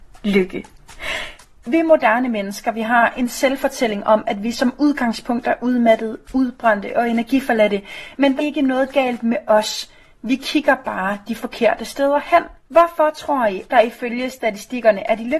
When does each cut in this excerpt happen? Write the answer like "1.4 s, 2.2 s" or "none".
8.4 s, 12.6 s, 13.7 s